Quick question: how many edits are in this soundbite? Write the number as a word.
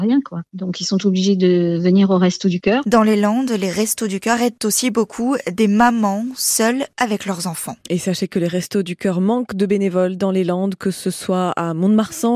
zero